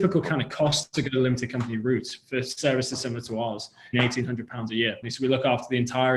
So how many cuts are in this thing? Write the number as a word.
two